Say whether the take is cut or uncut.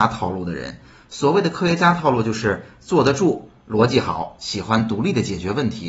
uncut